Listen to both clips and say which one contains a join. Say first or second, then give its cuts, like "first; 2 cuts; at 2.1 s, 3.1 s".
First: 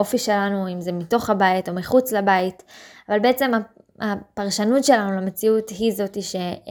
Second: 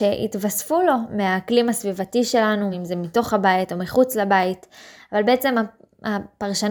second; 1 cut; at 2.7 s